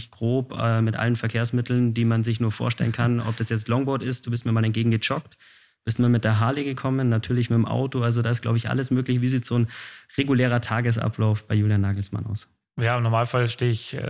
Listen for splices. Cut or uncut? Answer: uncut